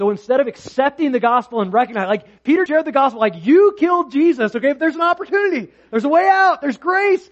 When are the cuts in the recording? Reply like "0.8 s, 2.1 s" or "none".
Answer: 2.7 s